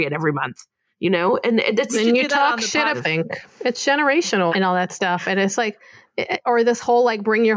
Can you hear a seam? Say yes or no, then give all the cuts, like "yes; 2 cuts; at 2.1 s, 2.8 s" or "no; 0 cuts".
yes; 2 cuts; at 2.9 s, 4.5 s